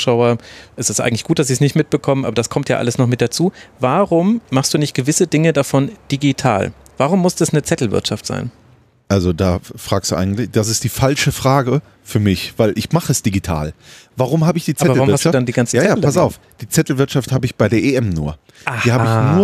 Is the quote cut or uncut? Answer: uncut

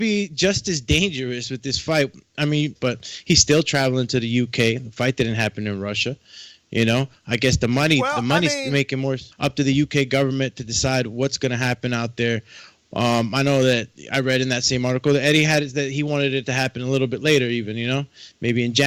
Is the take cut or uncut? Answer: cut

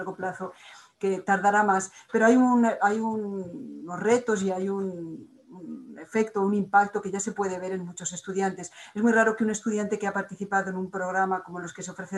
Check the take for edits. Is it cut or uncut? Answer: uncut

